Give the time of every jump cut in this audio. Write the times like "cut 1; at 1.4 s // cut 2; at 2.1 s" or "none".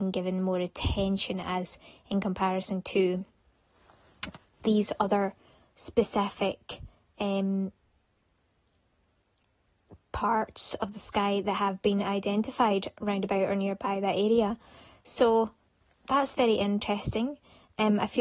none

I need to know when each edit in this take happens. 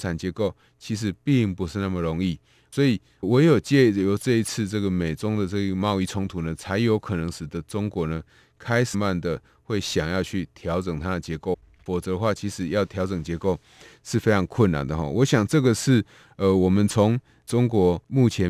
cut 1; at 8.9 s

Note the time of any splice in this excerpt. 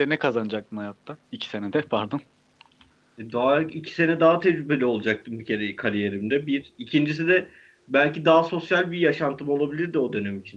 cut 1; at 1.2 s

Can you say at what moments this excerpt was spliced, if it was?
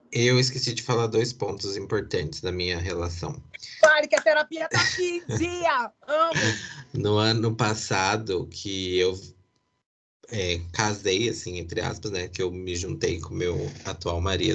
none

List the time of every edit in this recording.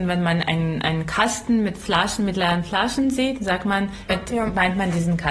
cut 1; at 4.1 s

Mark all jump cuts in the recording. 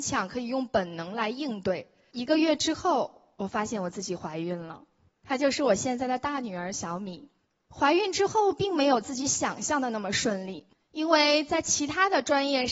cut 1; at 2.1 s

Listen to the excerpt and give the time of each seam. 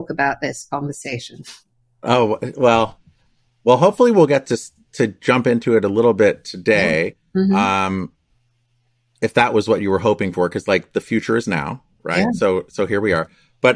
none

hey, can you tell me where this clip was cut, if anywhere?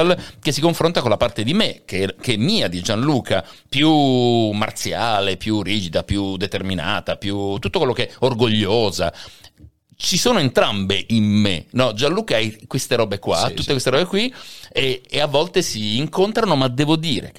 none

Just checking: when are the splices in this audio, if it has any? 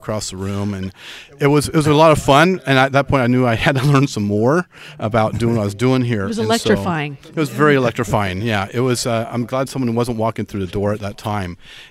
none

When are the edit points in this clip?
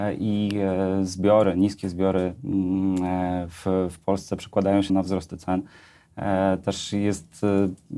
cut 1; at 4.9 s

